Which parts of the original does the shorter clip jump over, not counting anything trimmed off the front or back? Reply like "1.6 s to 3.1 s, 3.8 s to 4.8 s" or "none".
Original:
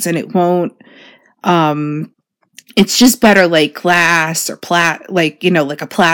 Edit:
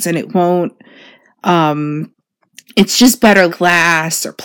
3.5 s to 3.7 s